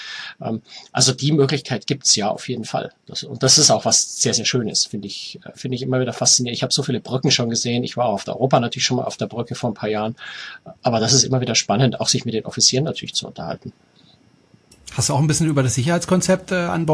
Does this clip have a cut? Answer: no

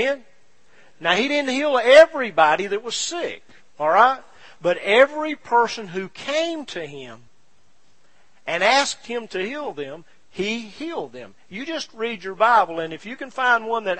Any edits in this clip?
no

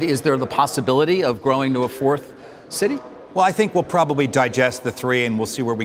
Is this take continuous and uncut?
yes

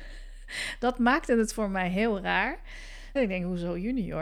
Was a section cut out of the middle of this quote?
yes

